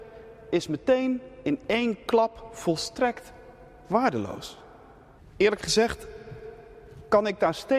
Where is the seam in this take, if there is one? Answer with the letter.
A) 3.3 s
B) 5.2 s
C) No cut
B